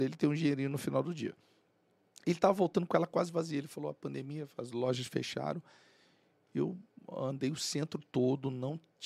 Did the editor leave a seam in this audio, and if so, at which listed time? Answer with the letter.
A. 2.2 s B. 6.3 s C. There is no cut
C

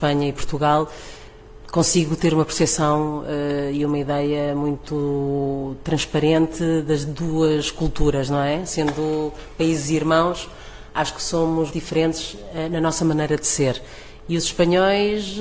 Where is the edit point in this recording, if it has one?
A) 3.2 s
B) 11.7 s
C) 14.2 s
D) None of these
B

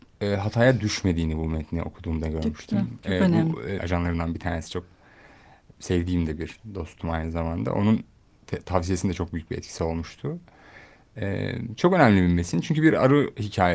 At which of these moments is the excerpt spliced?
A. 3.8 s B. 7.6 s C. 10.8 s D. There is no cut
A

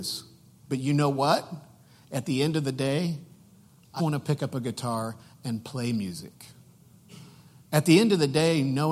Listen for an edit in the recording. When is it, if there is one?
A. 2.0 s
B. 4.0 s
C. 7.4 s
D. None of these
B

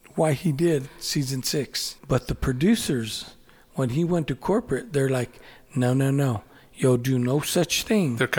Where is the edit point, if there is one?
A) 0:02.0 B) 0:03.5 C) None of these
A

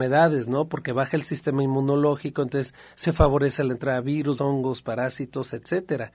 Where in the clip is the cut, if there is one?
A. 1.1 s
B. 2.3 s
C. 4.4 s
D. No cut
C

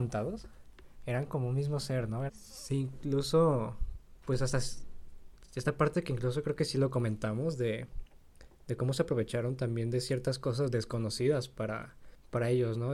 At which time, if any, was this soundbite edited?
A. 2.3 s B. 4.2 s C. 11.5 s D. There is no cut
A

